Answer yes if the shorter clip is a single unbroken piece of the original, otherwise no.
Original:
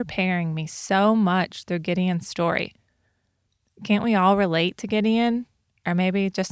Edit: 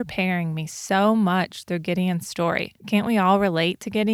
no